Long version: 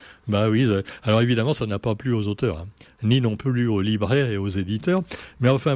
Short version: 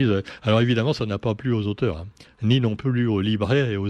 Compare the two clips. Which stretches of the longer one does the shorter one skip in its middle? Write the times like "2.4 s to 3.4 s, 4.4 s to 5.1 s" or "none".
none

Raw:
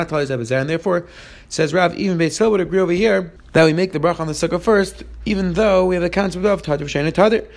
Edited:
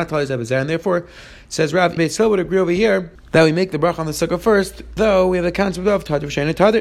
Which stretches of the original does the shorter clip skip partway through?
2.0 s to 2.2 s, 5.2 s to 5.5 s

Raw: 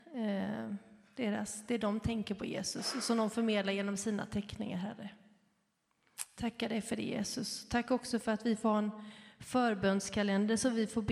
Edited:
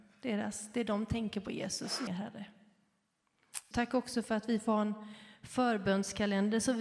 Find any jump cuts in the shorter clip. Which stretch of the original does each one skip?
3.0 s to 4.7 s, 6.3 s to 7.7 s

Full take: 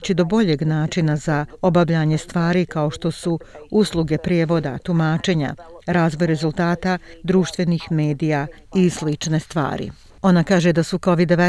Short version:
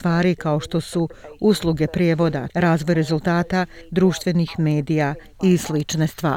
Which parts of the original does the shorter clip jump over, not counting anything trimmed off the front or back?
4.8 s to 5.8 s

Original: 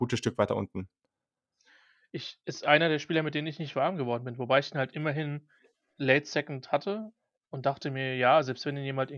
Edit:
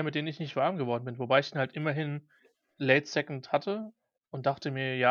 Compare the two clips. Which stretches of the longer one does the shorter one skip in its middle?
none

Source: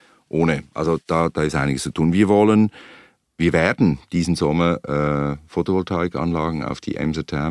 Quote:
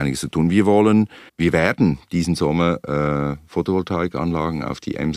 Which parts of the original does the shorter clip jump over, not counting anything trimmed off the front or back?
2.9 s to 3.3 s

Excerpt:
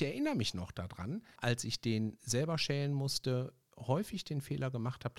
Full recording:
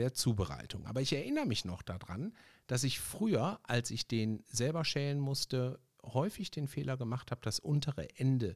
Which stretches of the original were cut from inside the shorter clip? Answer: 2.5 s to 3.6 s

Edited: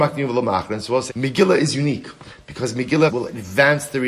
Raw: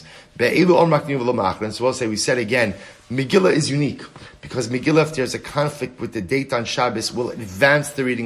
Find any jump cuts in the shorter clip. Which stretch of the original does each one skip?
2.0 s to 3.0 s, 5.0 s to 7.1 s

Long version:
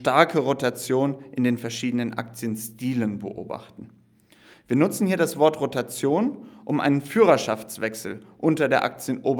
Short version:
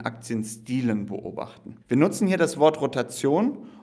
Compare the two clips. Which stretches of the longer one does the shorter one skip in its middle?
3.9 s to 4.6 s

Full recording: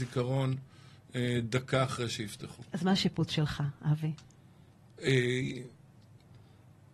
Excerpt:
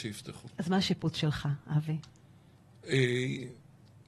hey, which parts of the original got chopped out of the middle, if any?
none

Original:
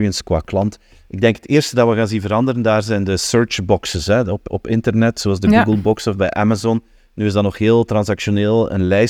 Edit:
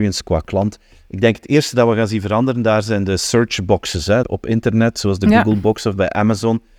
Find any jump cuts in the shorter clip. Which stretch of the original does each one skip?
4.2 s to 4.4 s

